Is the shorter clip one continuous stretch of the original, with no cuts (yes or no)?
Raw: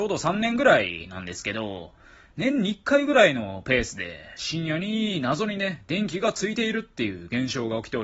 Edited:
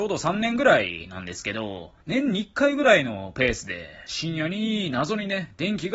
no